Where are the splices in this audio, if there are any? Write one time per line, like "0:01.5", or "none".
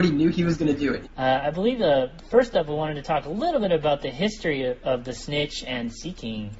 0:01.0